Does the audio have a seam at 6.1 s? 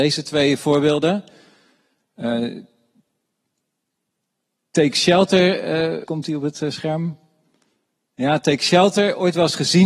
yes; 1 cut; at 6.1 s

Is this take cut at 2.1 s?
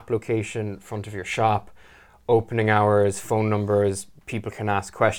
no; 0 cuts

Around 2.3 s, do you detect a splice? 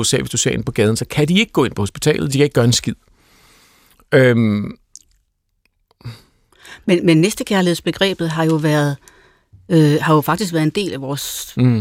yes; 1 cut; at 2.3 s

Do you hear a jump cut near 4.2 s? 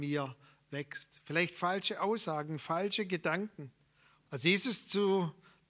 yes; 1 cut; at 4.2 s

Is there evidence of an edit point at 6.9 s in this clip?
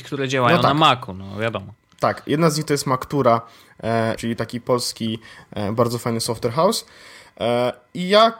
no; 1 cut; at 4.2 s

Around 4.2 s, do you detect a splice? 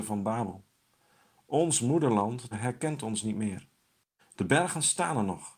yes; 2 cuts; at 2.5 s, 4.2 s

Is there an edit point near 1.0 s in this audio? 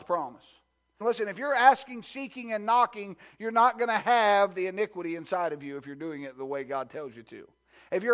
yes; 1 cut; at 1.0 s

